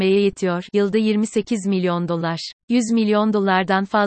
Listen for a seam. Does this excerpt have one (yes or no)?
yes